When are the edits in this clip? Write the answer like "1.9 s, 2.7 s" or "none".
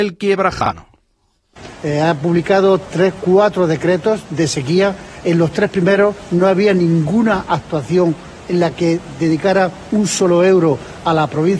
1.8 s